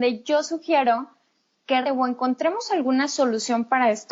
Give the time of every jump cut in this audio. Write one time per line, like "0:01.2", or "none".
0:01.8